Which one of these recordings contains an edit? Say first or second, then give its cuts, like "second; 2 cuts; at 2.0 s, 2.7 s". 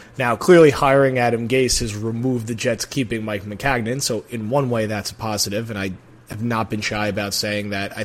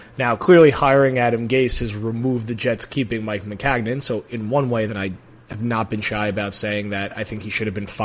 second; 1 cut; at 4.9 s